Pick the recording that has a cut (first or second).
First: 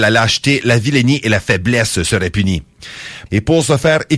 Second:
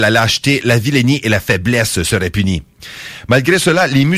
first